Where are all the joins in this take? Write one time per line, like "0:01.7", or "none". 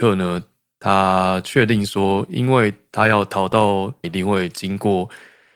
0:04.0